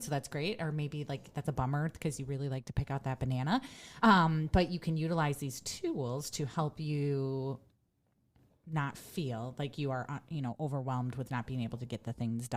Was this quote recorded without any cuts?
yes; 0 cuts

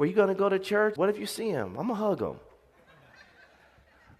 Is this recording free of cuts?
no; 1 cut; at 1.0 s

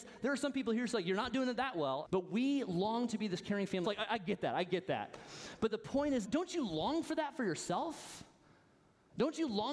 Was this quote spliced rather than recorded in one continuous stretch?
yes; 3 cuts; at 2.0 s, 3.8 s, 6.2 s

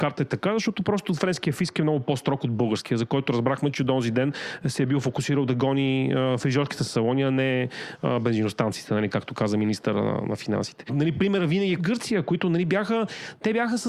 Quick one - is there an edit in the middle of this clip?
yes; 1 cut; at 11.8 s

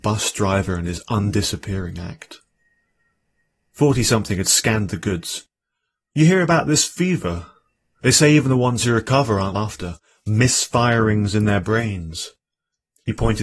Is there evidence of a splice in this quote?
yes; 1 cut; at 9.5 s

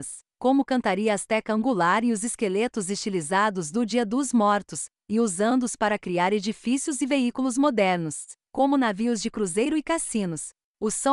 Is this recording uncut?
yes; 0 cuts

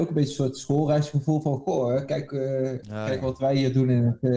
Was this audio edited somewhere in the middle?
no; 0 cuts

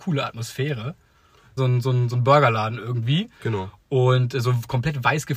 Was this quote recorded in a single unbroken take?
no; 1 cut; at 1.6 s

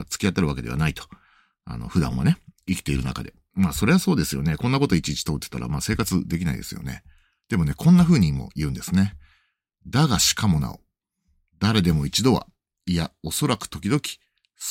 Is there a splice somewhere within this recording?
no; 0 cuts

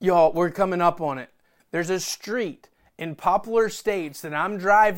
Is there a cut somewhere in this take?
yes; 1 cut; at 1.6 s

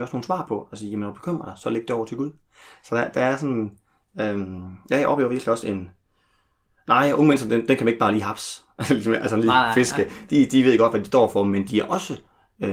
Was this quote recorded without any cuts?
yes; 0 cuts

